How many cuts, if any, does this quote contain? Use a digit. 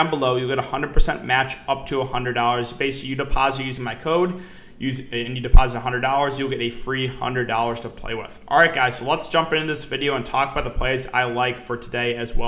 0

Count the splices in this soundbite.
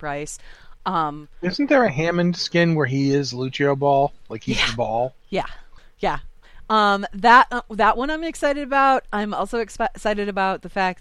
0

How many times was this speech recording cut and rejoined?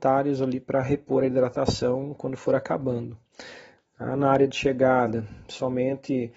1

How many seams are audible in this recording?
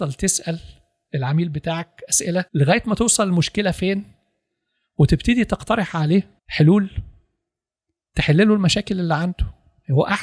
2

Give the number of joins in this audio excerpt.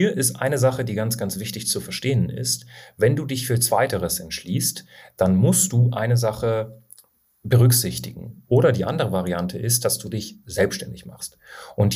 1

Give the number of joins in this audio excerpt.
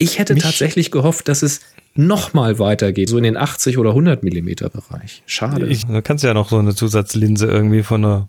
2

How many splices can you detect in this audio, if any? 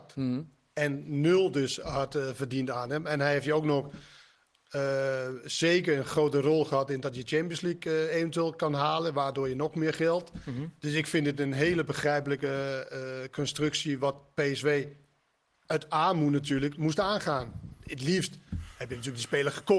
0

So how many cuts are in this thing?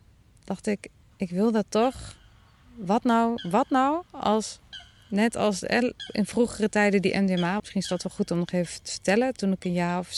1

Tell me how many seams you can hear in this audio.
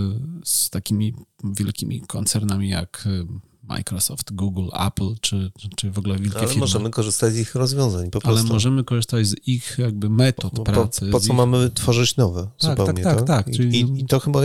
0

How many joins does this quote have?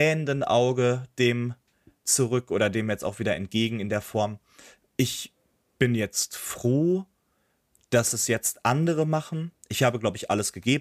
0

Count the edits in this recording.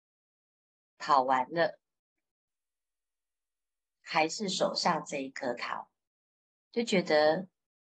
1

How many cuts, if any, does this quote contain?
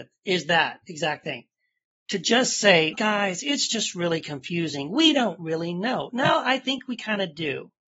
1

